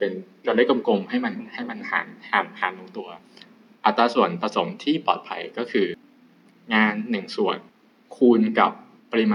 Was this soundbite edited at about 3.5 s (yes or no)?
no